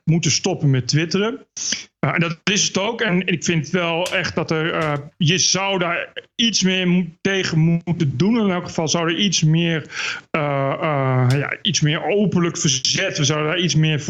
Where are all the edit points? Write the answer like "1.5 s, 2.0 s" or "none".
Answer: none